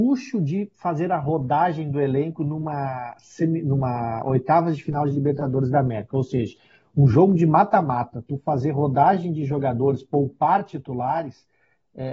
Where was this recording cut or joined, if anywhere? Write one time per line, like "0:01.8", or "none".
none